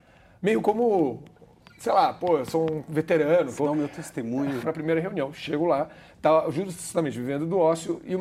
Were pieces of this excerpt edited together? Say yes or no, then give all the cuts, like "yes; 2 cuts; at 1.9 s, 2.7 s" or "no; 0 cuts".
yes; 2 cuts; at 3.6 s, 4.6 s